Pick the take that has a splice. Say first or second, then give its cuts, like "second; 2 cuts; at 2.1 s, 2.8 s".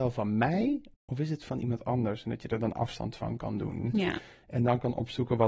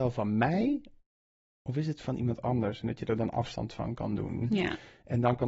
first; 1 cut; at 0.9 s